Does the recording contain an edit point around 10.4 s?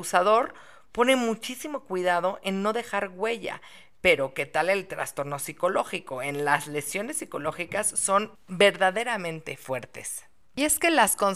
no; 0 cuts

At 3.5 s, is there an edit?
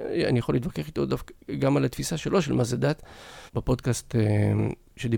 yes; 1 cut; at 3.5 s

